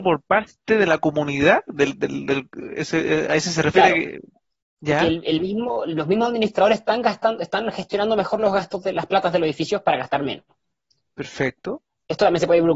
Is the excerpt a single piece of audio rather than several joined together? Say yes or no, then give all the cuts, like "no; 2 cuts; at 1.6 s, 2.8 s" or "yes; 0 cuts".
yes; 0 cuts